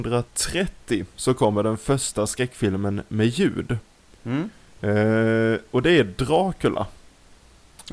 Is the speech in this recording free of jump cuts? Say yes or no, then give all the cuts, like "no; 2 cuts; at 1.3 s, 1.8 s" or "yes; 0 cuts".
yes; 0 cuts